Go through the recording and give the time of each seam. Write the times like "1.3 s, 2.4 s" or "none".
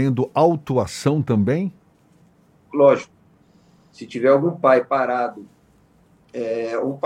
2.7 s